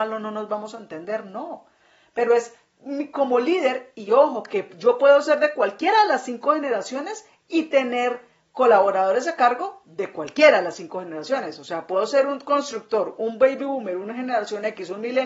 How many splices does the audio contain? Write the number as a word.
zero